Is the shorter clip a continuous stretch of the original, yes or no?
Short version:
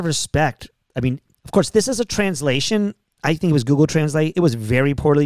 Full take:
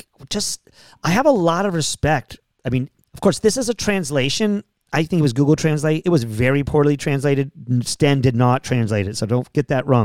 yes